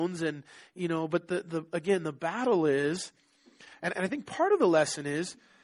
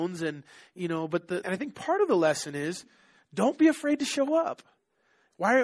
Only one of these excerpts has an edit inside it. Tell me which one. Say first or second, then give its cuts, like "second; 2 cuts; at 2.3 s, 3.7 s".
second; 1 cut; at 1.4 s